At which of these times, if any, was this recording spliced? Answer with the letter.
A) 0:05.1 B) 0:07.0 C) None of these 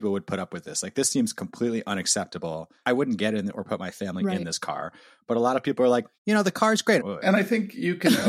B